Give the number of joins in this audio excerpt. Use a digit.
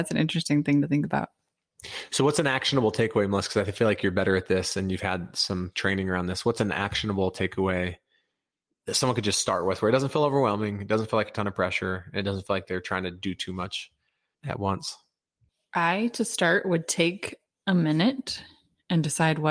0